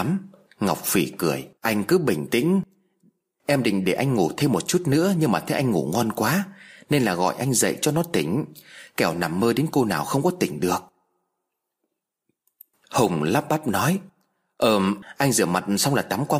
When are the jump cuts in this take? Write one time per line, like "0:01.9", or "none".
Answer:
0:01.5